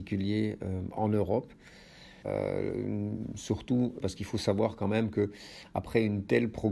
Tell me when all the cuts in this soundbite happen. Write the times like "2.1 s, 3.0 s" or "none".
2.2 s, 4.0 s